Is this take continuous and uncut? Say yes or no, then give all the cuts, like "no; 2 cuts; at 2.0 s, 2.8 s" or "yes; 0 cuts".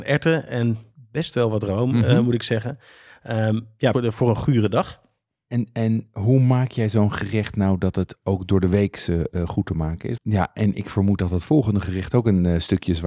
no; 2 cuts; at 3.9 s, 10.2 s